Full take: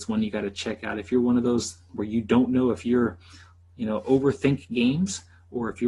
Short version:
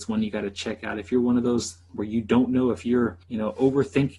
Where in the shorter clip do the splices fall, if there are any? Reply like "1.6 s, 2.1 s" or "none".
3.2 s